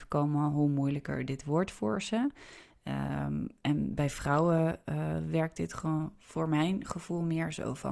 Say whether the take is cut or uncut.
uncut